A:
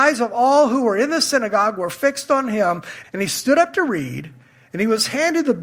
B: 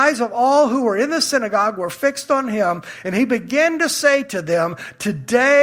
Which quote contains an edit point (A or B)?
A